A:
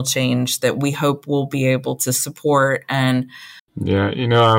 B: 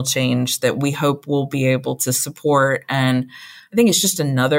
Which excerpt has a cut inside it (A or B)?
A